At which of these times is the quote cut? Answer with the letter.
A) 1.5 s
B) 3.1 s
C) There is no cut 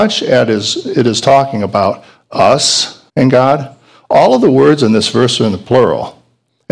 B